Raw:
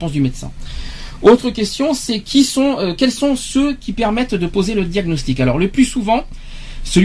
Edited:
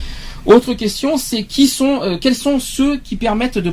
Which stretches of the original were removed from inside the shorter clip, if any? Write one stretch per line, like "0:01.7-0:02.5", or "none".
none